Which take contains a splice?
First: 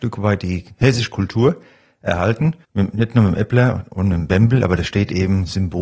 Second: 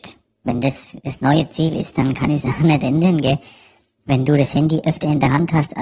first; 1 cut; at 2.6 s

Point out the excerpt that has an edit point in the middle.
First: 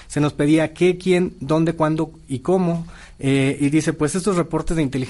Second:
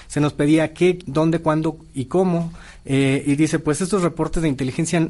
second; 1 cut; at 1.0 s

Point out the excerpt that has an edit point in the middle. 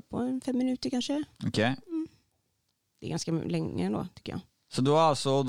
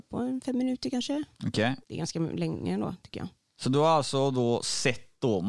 second; 1 cut; at 1.8 s

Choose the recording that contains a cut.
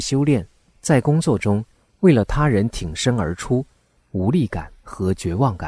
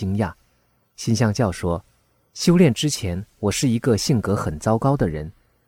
first; 2 cuts; at 1.9 s, 4.0 s

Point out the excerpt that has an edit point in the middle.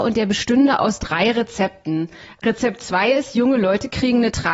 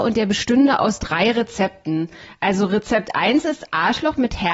first; 1 cut; at 2.4 s

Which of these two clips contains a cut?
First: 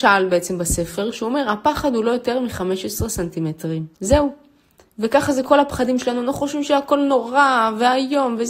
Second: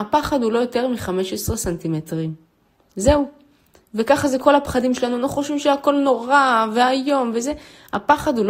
first; 1 cut; at 3.9 s

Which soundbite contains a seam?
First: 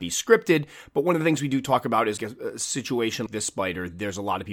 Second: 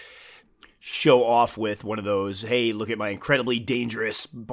first; 2 cuts; at 2.2 s, 3.3 s

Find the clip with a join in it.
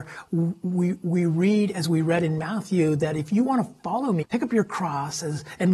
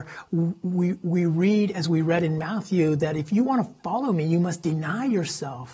first; 1 cut; at 4.2 s

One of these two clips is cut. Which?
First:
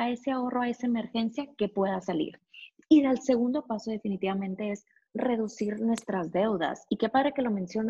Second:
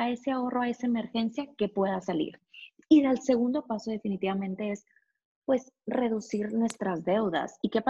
first; 1 cut; at 5.1 s

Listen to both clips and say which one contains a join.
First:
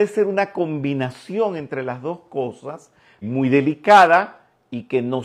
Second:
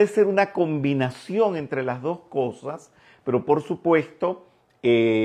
first; 1 cut; at 3.2 s

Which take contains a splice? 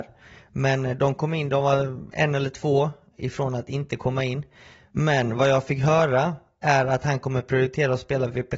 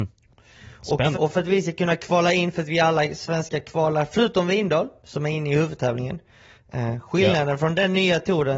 second; 1 cut; at 1.1 s

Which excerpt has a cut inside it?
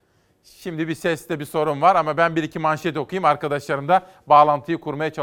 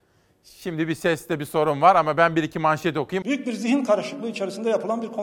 second; 1 cut; at 3.2 s

